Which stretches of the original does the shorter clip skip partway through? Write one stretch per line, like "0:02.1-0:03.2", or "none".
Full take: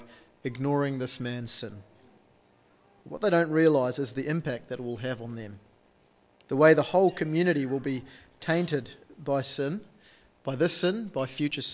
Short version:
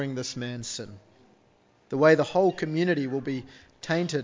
0:02.7-0:06.5

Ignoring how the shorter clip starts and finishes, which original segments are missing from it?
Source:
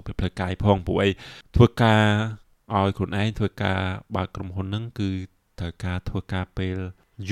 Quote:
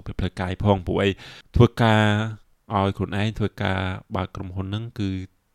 none

